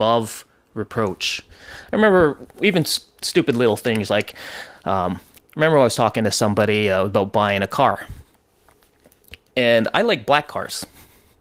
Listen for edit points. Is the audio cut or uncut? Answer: uncut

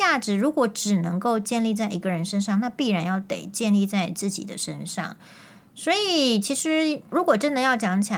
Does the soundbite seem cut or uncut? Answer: cut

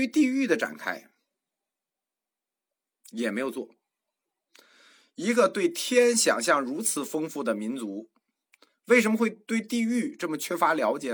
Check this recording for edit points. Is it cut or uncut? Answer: uncut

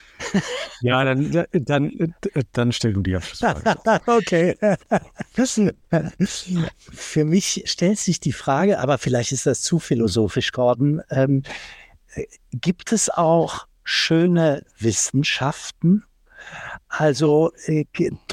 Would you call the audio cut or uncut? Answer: cut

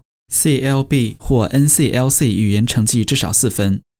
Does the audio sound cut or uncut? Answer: uncut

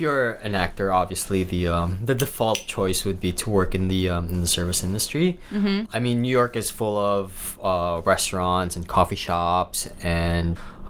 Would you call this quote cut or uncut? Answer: uncut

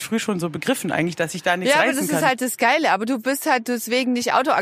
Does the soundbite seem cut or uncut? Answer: uncut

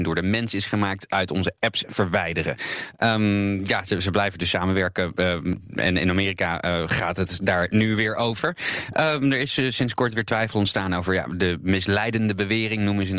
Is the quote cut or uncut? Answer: uncut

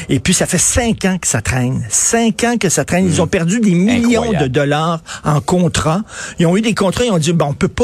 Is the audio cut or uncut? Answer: uncut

